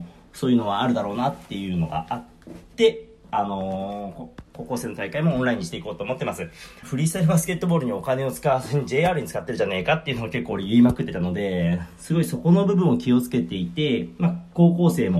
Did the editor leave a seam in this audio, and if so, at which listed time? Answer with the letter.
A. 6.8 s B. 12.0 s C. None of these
A